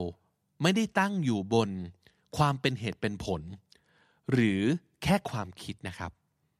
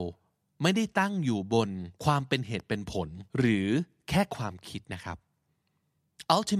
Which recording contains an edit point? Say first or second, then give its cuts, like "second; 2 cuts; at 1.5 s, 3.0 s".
second; 2 cuts; at 2.0 s, 3.3 s